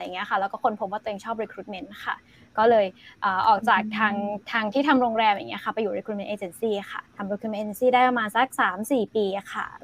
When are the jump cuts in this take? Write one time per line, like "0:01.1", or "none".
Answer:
0:07.1